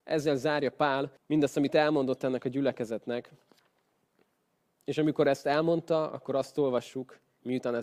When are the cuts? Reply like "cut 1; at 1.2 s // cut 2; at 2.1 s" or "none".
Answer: cut 1; at 1.2 s